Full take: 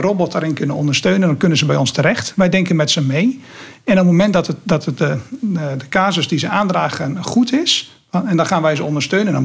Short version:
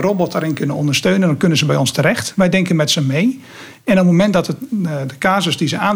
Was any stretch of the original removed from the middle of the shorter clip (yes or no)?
yes